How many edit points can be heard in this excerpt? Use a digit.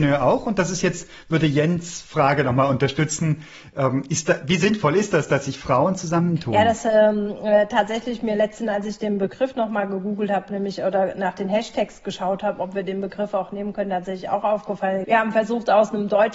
1